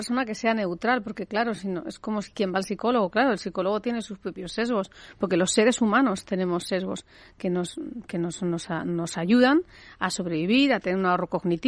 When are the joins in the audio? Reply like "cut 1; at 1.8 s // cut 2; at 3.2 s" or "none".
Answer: none